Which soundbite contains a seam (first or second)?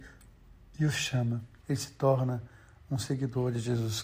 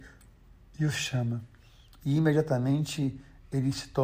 first